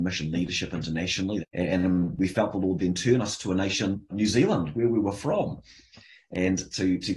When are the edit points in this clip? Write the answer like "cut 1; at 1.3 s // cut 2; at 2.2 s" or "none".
cut 1; at 1.4 s // cut 2; at 4.1 s

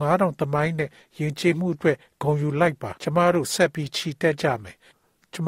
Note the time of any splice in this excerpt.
cut 1; at 3.0 s

